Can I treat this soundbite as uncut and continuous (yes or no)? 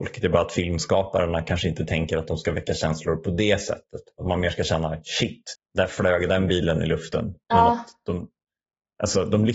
no